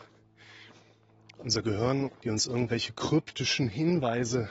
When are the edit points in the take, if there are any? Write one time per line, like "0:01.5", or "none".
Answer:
0:02.0

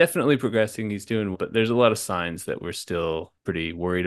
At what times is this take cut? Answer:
0:01.3

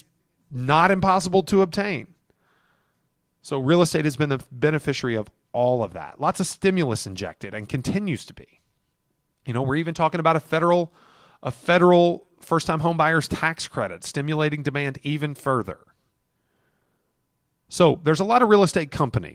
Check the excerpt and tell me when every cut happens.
none

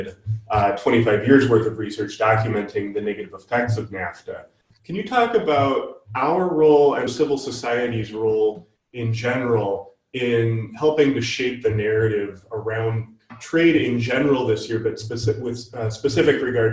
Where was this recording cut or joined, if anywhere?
0:04.8
0:07.1

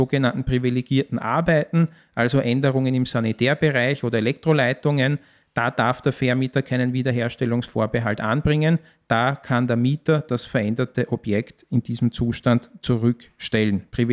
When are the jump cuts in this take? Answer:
none

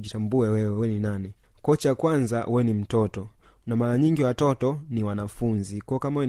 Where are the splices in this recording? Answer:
none

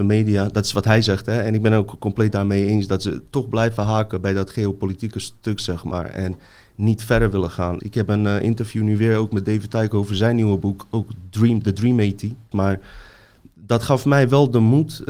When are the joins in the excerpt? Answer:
0:07.8
0:12.5

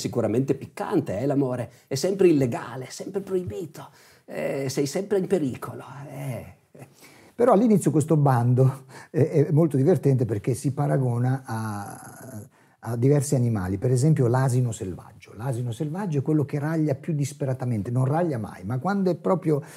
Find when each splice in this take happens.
none

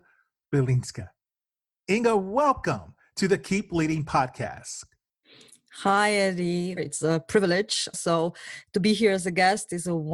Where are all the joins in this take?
0:06.8
0:07.9

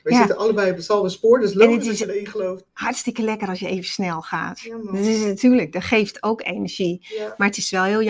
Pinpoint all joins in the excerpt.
none

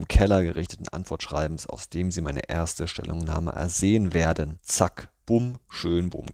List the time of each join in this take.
0:04.6

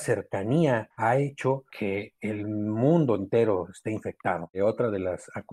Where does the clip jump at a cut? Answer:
0:04.5

